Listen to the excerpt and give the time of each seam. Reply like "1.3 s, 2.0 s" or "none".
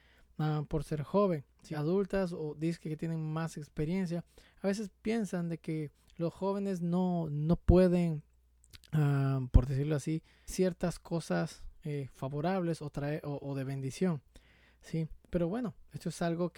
1.7 s, 10.5 s